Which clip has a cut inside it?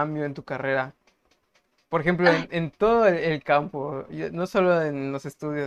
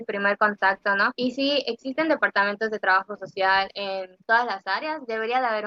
second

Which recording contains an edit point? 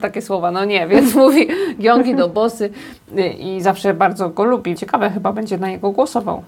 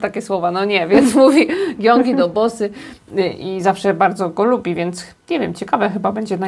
first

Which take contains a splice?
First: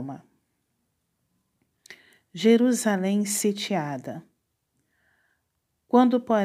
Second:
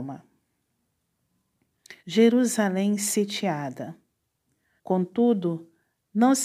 second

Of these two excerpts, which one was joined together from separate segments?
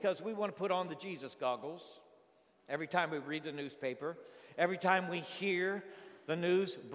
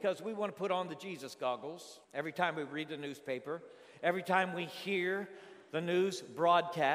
second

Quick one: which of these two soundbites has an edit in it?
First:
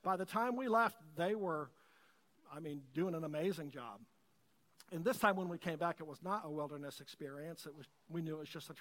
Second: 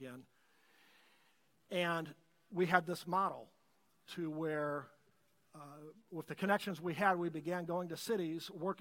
first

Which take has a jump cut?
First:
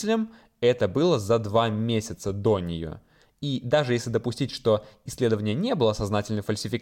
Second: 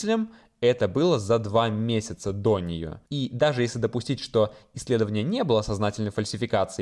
second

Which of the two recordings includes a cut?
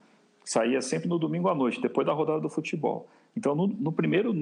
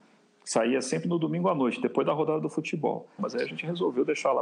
second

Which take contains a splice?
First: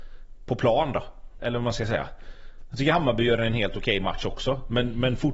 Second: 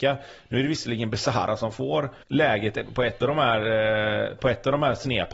second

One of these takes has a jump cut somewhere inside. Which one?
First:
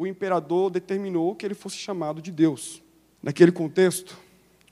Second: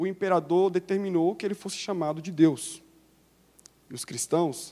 first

